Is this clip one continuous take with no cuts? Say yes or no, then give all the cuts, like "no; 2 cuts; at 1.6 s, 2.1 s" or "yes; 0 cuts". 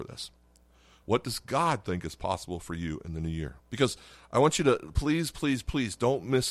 no; 2 cuts; at 1.0 s, 3.6 s